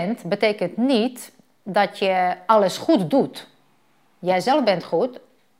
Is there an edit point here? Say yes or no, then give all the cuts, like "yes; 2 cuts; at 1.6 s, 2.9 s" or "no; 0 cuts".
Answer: no; 0 cuts